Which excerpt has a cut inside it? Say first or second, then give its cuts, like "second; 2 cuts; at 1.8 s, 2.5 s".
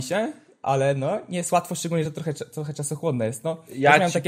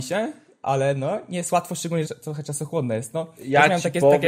second; 1 cut; at 2.0 s